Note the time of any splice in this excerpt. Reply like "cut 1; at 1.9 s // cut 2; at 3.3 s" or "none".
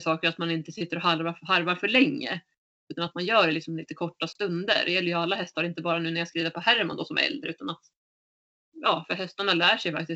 none